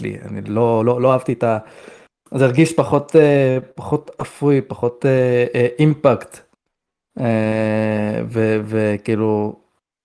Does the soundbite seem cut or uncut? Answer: uncut